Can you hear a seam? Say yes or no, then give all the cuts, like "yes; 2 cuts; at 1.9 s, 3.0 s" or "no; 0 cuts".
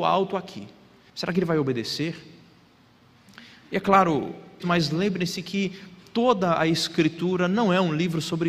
yes; 2 cuts; at 1.1 s, 4.6 s